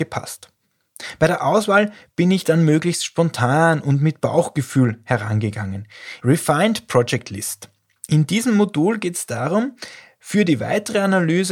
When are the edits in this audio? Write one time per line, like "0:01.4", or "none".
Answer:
0:06.2

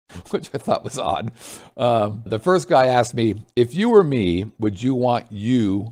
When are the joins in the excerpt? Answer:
0:02.3

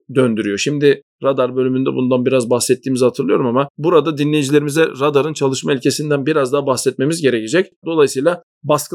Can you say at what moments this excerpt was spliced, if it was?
0:07.8

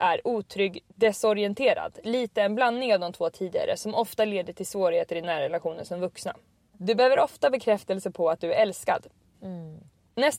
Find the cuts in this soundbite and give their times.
0:06.7
0:09.3

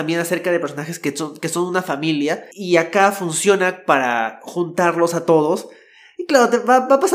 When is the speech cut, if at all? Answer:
0:02.5

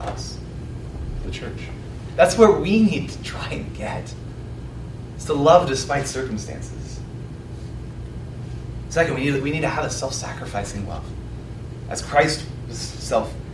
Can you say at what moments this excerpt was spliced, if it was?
0:02.1

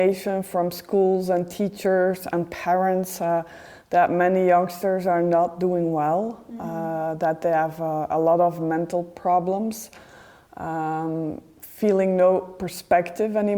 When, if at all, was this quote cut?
none

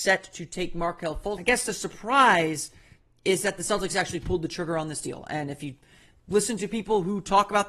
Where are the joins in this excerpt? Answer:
0:01.4

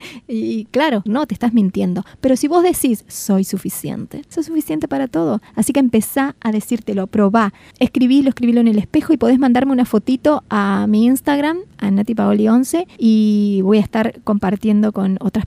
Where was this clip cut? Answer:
0:01.1

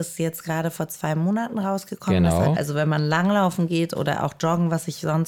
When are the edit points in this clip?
0:02.6

